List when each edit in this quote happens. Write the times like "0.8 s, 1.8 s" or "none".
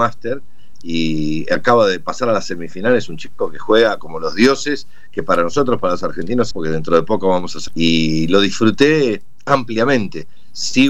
6.5 s, 7.7 s